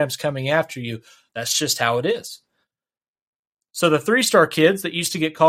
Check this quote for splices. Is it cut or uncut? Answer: cut